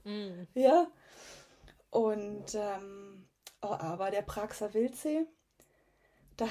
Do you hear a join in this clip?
yes; 1 cut; at 3.8 s

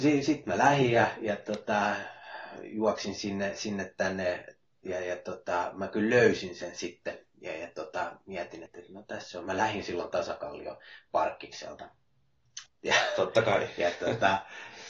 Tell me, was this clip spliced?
yes; 2 cuts; at 8.7 s, 12.7 s

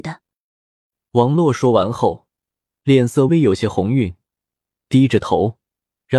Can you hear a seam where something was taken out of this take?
yes; 1 cut; at 3.3 s

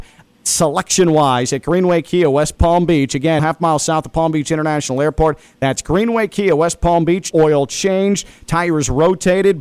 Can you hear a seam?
yes; 2 cuts; at 3.4 s, 7.3 s

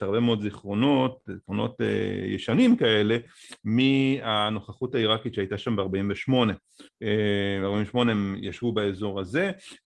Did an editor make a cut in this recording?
no; 0 cuts

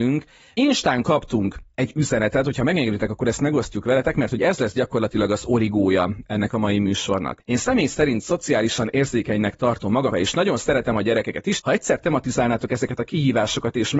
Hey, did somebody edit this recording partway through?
yes; 2 cuts; at 10.1 s, 11.6 s

